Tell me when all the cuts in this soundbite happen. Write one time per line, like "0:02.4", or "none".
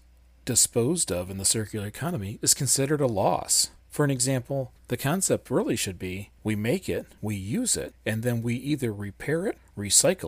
0:03.8
0:06.4